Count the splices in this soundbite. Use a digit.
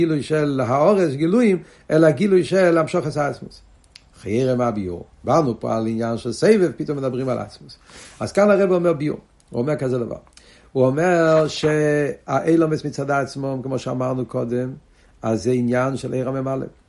1